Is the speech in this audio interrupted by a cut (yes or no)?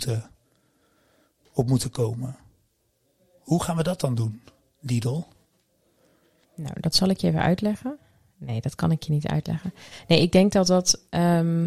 no